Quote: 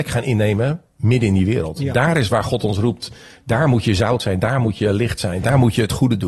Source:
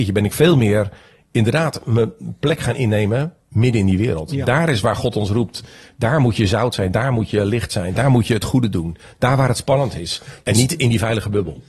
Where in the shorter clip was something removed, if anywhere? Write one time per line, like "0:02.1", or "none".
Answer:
none

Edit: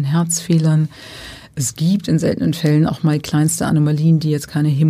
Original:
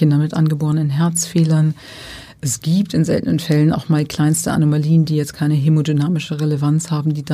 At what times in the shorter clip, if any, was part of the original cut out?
none

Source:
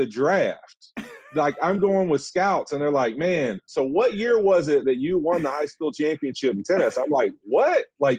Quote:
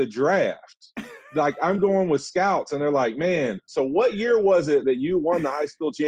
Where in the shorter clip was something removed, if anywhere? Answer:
none

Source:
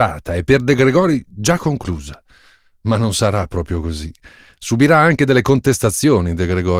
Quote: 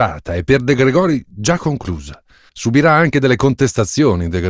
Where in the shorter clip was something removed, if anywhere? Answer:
0:02.5

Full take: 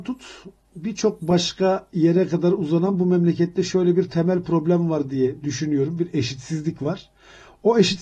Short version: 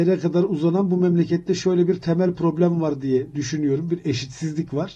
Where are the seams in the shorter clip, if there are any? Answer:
none

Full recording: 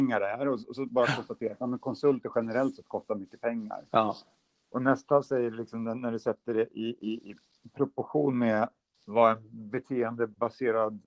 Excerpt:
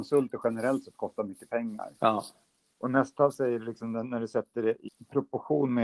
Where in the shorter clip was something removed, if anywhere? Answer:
0:04.9

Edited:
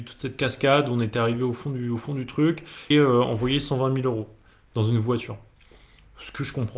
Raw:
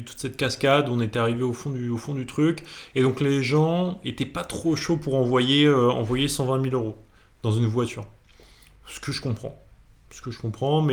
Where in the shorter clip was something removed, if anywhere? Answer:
0:02.9

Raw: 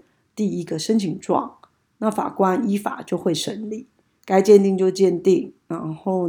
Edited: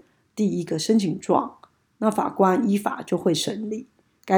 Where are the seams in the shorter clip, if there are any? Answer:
none

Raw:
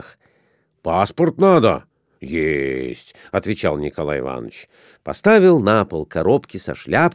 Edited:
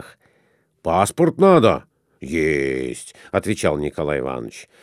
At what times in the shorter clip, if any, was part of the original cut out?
none

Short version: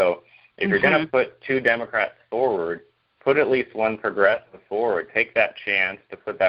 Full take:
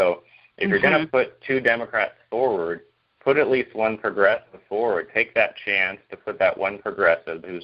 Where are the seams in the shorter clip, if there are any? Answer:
none

